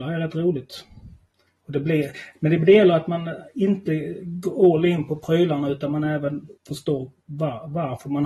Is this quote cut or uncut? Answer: cut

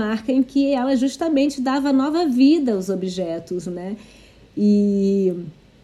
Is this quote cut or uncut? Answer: uncut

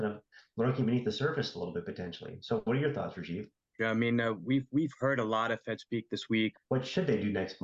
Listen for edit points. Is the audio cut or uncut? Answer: cut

